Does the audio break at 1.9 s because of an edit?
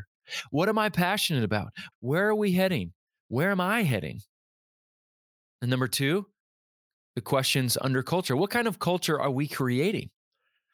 yes; 1 cut; at 1.9 s

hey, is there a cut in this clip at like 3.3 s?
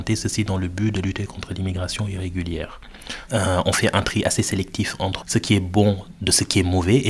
yes; 2 cuts; at 3.3 s, 5.2 s

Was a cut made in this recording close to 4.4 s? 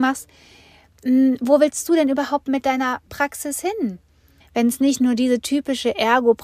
yes; 1 cut; at 4.4 s

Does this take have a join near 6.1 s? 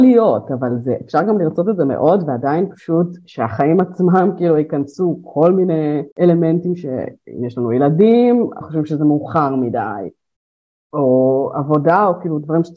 yes; 2 cuts; at 6.1 s, 8.6 s

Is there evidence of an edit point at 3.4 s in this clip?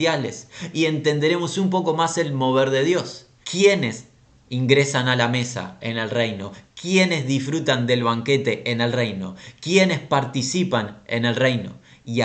yes; 1 cut; at 3.4 s

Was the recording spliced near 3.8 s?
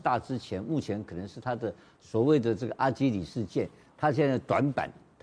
no; 0 cuts

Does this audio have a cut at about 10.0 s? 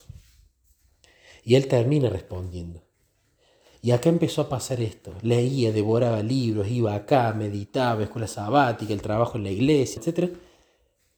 yes; 1 cut; at 10.0 s

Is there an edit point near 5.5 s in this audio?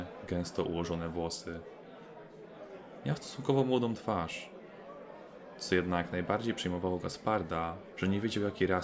no; 1 cut; at 7.9 s

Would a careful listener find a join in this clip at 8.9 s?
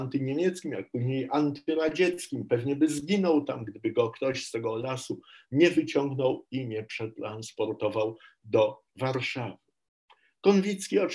yes; 1 cut; at 8.9 s

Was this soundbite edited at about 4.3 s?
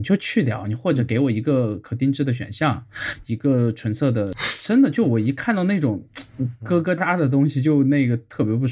yes; 2 cuts; at 4.3 s, 7.0 s

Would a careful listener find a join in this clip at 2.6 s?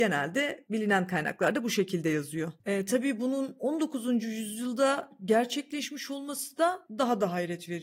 yes; 1 cut; at 2.6 s

